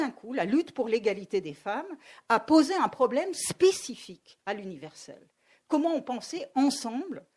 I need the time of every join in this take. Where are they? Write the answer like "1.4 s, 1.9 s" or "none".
none